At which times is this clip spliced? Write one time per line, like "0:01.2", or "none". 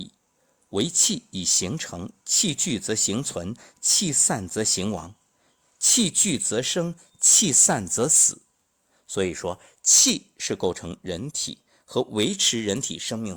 none